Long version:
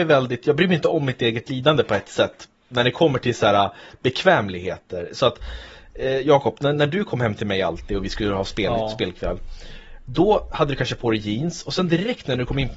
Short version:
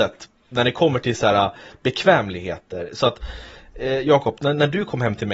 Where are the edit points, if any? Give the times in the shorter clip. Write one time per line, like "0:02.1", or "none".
none